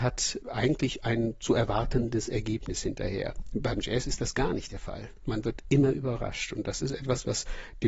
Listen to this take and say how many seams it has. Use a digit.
0